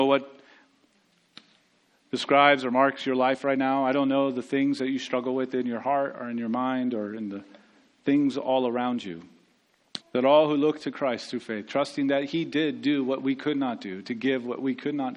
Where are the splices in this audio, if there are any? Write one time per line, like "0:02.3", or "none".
0:10.0